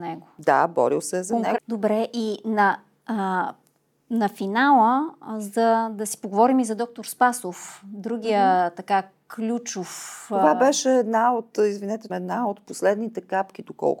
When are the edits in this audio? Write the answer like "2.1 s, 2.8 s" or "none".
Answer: 1.6 s, 12.1 s